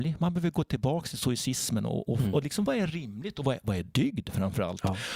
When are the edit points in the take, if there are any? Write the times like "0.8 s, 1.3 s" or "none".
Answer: none